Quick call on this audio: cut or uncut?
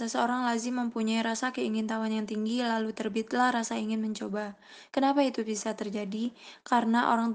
cut